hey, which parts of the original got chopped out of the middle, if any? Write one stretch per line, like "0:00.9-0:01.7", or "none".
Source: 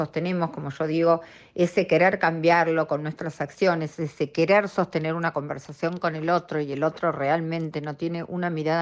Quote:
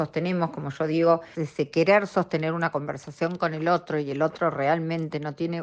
0:01.3-0:04.0